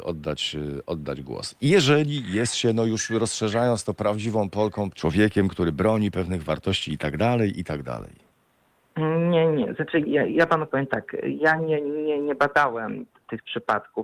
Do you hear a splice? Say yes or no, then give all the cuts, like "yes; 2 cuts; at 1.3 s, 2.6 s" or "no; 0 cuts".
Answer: yes; 1 cut; at 4.9 s